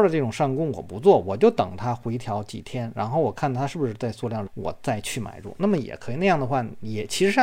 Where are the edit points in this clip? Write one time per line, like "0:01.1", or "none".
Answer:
0:04.5